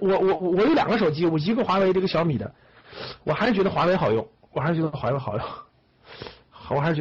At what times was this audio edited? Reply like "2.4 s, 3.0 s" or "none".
none